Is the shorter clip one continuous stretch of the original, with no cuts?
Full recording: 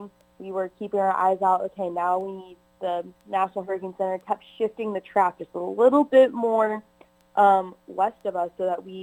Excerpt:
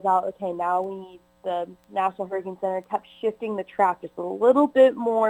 yes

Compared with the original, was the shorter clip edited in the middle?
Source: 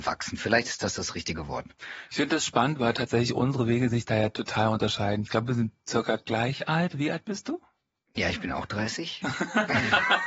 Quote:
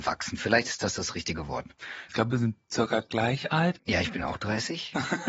yes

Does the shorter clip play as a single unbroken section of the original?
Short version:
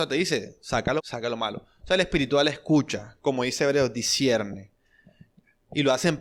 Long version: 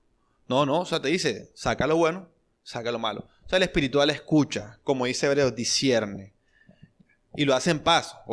no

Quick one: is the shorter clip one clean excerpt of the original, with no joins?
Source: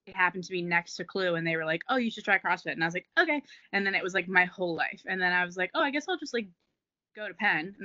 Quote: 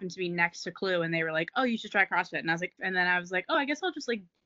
no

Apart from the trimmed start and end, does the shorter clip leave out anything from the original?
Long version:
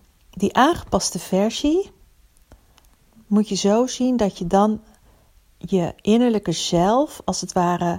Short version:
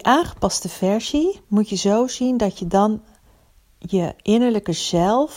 yes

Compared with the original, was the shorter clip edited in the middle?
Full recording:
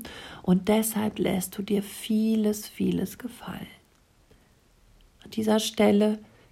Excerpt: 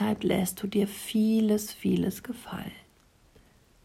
no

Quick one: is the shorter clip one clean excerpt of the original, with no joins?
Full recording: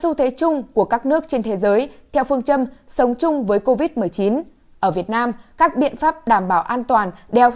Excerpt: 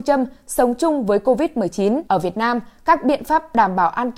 no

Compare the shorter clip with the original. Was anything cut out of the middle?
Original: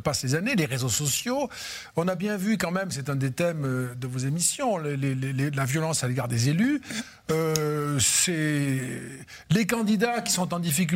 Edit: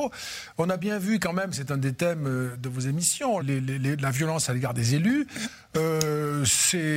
yes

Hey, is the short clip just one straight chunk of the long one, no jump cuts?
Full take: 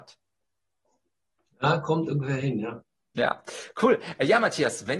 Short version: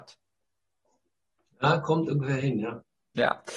yes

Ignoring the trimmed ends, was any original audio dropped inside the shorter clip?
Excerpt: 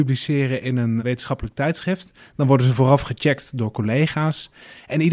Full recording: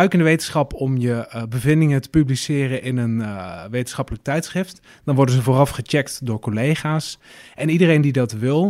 yes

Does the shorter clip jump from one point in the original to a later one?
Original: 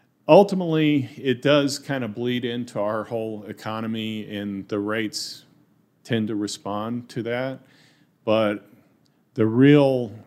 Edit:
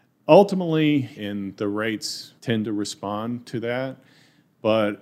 yes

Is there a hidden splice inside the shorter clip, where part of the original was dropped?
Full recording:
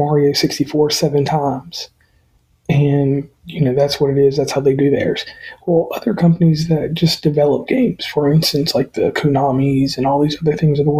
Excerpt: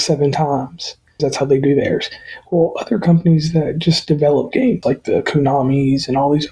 yes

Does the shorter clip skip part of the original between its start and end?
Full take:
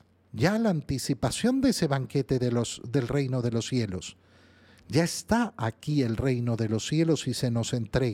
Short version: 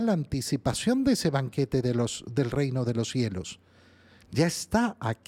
no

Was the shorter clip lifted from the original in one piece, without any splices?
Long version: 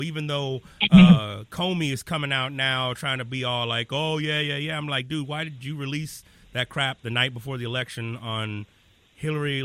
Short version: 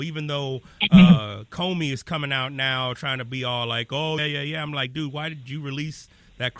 no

